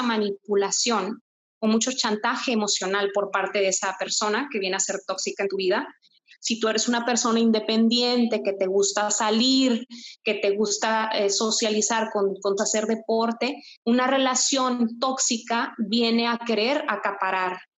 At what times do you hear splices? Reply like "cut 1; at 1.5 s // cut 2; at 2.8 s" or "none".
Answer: cut 1; at 6.3 s // cut 2; at 12.6 s